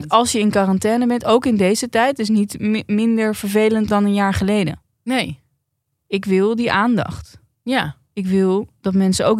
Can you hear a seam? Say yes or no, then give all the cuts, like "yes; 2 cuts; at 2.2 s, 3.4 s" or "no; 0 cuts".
yes; 1 cut; at 3.9 s